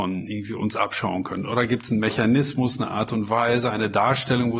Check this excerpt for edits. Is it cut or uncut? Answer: uncut